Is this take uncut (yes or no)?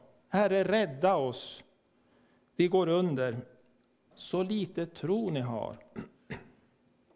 no